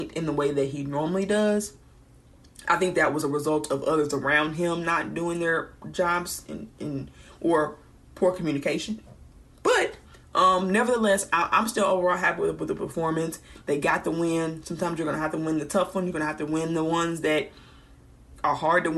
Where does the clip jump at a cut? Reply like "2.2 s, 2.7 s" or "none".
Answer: none